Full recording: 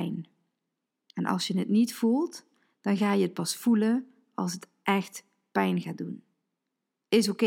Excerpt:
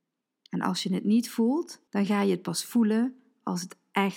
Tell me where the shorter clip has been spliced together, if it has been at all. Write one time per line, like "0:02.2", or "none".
0:01.9